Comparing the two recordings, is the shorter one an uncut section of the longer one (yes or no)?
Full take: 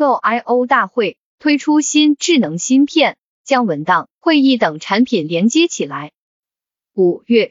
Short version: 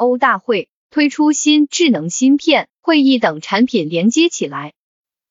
no